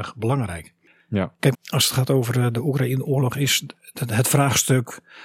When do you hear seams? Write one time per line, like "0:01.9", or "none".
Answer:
0:01.5
0:03.9